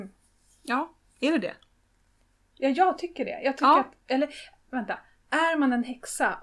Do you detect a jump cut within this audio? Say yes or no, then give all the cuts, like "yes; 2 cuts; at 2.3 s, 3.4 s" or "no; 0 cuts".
yes; 1 cut; at 4.7 s